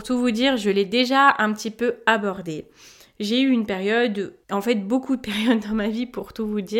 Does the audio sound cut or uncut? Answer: cut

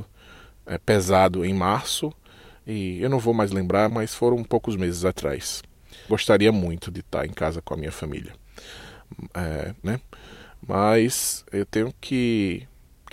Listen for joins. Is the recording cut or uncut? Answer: cut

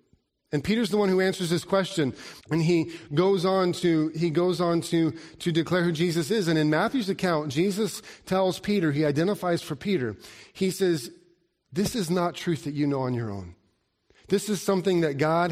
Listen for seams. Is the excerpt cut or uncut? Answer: cut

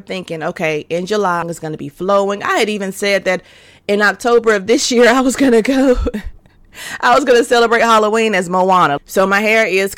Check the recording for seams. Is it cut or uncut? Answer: cut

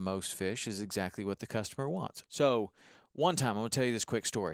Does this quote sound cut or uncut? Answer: cut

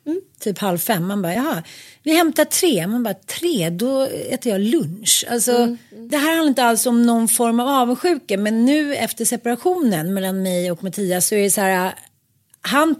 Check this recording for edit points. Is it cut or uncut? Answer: uncut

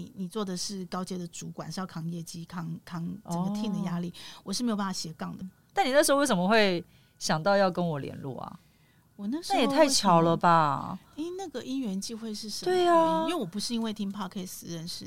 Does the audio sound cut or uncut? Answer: cut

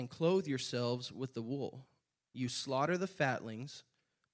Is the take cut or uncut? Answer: uncut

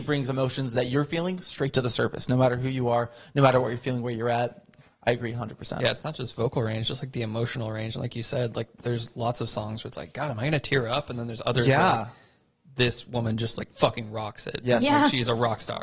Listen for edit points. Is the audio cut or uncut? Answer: uncut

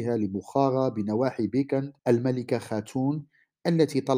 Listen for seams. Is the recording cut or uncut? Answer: cut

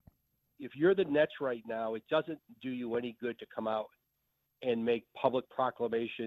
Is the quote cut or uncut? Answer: uncut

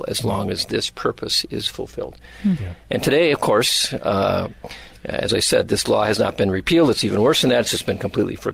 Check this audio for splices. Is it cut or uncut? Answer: uncut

